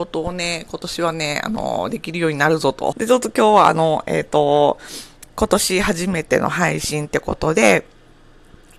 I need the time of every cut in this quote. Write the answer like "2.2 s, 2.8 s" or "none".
2.9 s